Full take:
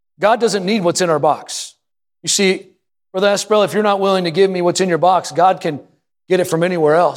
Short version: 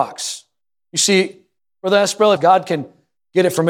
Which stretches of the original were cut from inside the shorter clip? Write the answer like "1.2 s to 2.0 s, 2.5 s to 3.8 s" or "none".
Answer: 3.7 s to 5.3 s